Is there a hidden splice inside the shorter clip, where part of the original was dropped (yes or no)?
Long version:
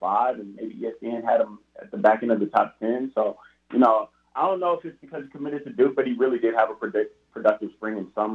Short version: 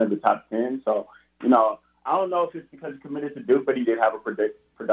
yes